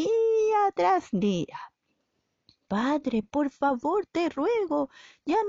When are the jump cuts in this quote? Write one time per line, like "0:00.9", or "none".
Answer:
none